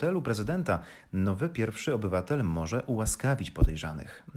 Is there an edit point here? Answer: no; 0 cuts

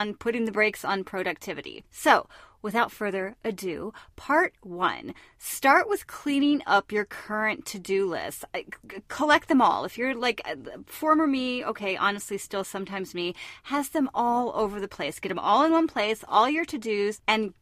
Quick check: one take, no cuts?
yes; 0 cuts

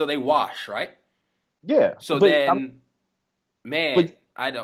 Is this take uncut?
yes; 0 cuts

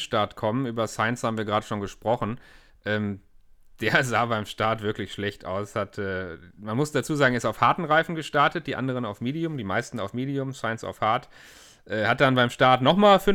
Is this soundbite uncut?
yes; 0 cuts

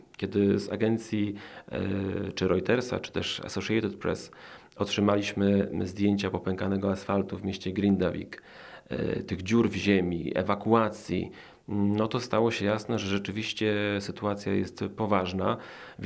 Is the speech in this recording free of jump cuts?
yes; 0 cuts

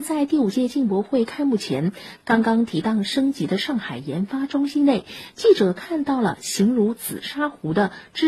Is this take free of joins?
yes; 0 cuts

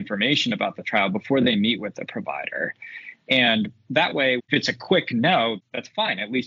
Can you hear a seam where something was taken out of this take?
yes; 1 cut; at 4.4 s

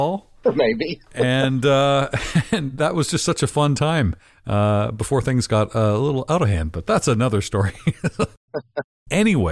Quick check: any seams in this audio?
no; 0 cuts

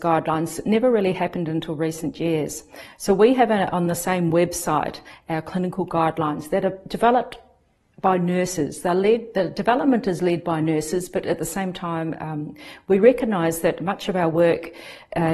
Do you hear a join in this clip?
no; 0 cuts

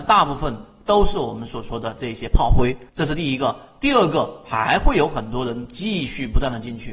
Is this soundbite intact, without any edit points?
no; 1 cut; at 2.9 s

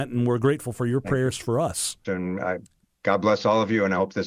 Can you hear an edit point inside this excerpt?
yes; 1 cut; at 2.0 s

